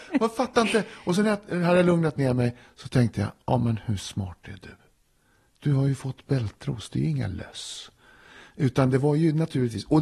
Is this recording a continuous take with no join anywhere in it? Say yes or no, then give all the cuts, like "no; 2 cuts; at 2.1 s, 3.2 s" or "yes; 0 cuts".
yes; 0 cuts